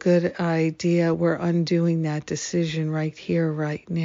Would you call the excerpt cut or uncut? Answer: uncut